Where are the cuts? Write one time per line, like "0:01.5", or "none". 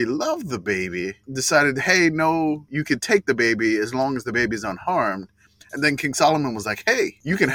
none